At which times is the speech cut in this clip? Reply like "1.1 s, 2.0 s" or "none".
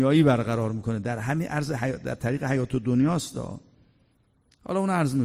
none